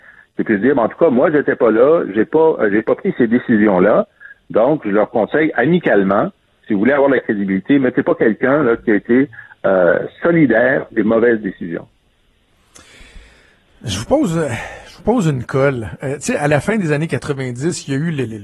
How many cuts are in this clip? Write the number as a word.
zero